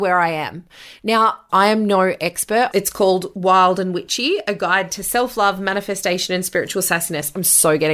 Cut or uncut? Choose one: cut